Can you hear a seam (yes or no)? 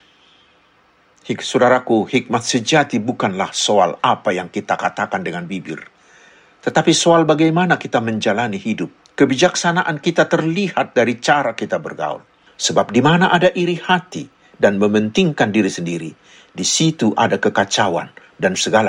yes